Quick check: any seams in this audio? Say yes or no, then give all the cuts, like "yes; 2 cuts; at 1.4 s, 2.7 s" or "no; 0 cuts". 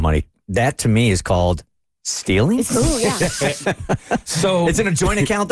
no; 0 cuts